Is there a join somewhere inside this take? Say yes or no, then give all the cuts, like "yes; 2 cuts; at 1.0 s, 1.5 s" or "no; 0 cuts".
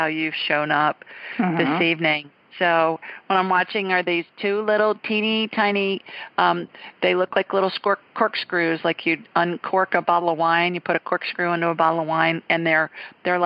no; 0 cuts